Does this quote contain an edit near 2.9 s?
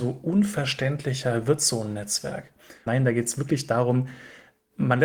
yes; 1 cut; at 2.9 s

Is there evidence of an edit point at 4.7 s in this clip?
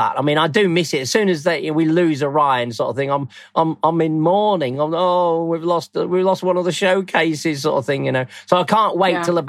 no; 0 cuts

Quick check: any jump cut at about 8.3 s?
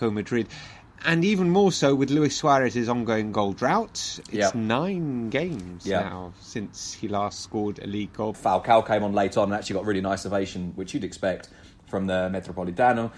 yes; 1 cut; at 8.3 s

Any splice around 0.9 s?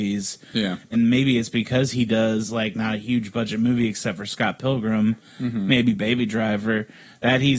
yes; 1 cut; at 0.9 s

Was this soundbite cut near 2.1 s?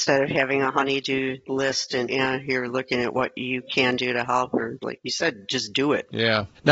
yes; 1 cut; at 2.1 s

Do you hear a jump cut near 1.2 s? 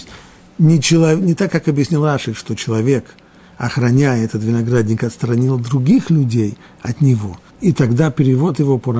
yes; 2 cuts; at 1.2 s, 7.5 s

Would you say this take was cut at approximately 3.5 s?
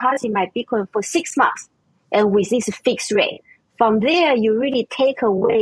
no; 0 cuts

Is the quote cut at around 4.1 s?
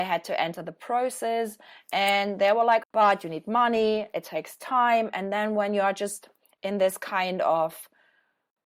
no; 1 cut; at 2.8 s

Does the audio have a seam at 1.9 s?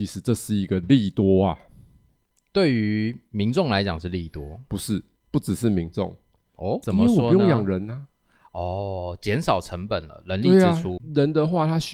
no; 1 cut; at 6.8 s

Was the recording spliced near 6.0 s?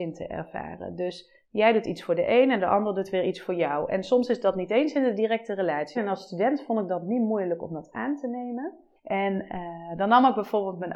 yes; 2 cuts; at 6.0 s, 9.0 s

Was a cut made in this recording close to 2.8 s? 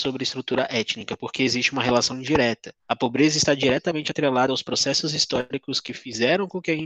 yes; 1 cut; at 2.8 s

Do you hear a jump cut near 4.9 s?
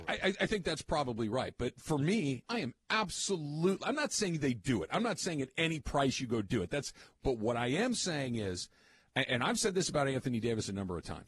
no; 1 cut; at 2.4 s

